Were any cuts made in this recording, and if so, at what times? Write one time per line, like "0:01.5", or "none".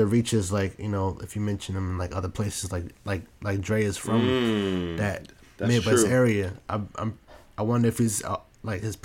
none